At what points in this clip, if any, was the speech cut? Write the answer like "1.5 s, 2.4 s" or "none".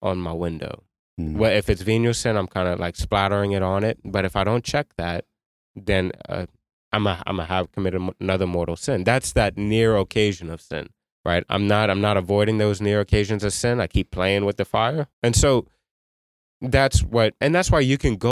11.1 s, 15.1 s